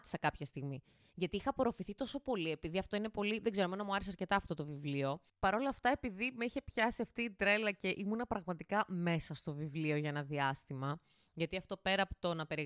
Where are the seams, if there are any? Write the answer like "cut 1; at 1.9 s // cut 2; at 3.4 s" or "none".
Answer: none